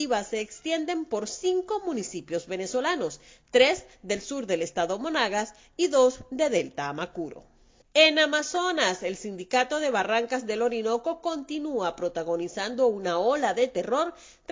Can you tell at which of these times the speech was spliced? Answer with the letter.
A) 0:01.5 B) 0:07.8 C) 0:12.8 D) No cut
B